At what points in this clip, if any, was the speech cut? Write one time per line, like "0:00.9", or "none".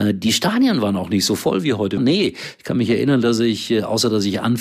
0:02.0